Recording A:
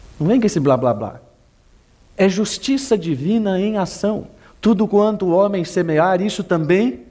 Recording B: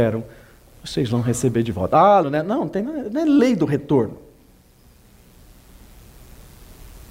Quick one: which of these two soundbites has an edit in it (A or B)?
B